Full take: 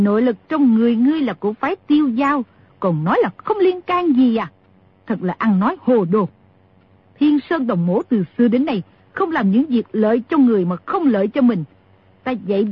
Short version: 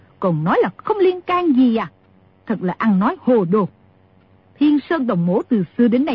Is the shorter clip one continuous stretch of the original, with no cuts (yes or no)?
yes